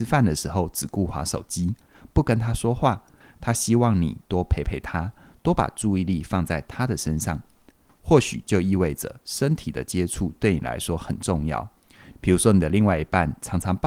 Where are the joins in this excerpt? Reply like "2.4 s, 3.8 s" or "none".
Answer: 3.2 s, 7.9 s, 12.1 s